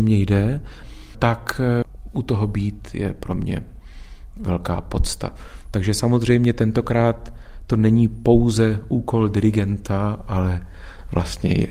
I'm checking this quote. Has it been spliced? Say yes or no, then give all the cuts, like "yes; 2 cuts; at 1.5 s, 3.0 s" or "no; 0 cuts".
no; 0 cuts